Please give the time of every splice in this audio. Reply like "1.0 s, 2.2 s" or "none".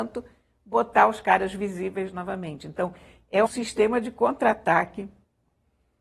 3.5 s